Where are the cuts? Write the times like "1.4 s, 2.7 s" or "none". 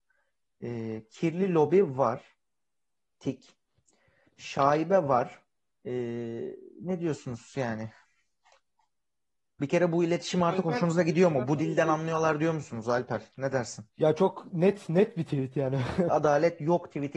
5.7 s, 13.9 s, 16.1 s